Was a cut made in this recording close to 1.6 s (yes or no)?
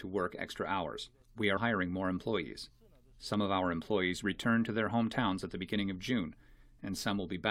yes